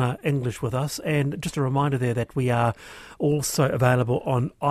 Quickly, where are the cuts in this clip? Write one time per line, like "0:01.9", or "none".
none

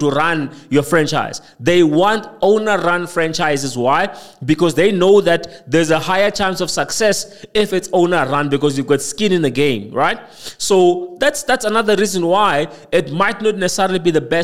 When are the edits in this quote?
none

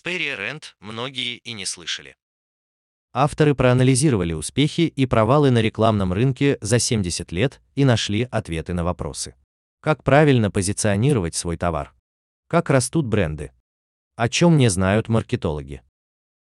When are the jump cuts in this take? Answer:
0:09.7
0:12.3

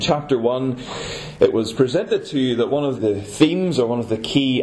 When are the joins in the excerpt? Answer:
0:03.0

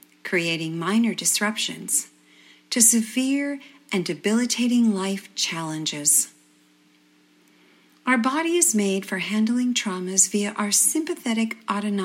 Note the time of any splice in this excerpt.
none

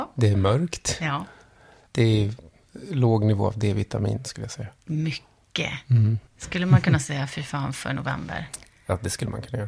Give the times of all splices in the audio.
0:06.3

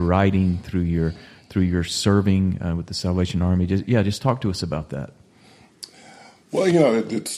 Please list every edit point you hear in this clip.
none

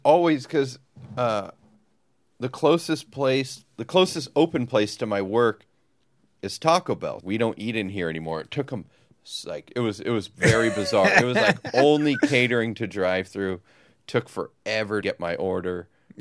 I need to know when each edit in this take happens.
0:07.2
0:15.0

